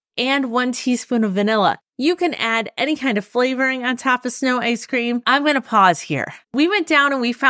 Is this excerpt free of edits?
no; 2 cuts; at 1.9 s, 6.4 s

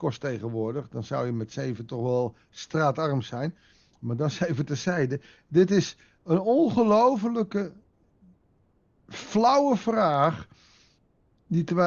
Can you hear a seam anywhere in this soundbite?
no; 0 cuts

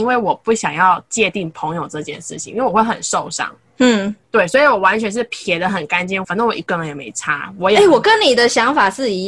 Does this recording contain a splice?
yes; 2 cuts; at 4.2 s, 6.2 s

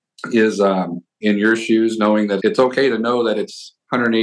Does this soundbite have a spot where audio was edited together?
yes; 2 cuts; at 1.2 s, 2.4 s

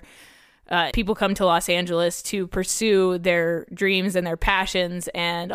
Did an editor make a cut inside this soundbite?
yes; 1 cut; at 0.9 s

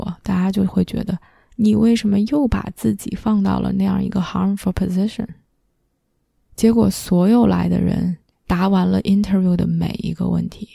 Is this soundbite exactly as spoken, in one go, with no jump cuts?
no; 2 cuts; at 6.4 s, 8.3 s

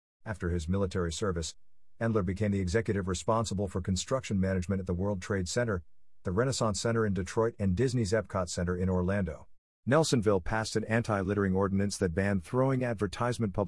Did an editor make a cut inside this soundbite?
yes; 1 cut; at 9.8 s

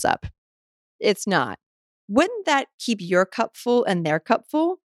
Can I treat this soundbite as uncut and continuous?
no; 1 cut; at 2.0 s

